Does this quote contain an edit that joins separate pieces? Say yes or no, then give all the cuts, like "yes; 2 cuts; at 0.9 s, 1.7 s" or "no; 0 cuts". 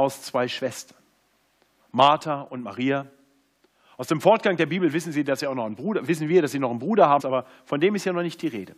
yes; 1 cut; at 7.2 s